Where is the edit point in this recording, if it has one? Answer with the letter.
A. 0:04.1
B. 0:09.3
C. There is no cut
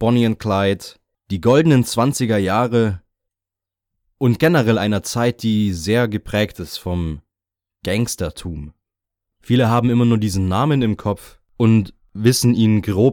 B